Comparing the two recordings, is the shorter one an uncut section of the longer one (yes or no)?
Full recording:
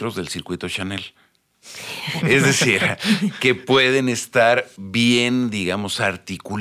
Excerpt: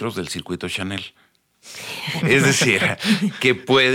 yes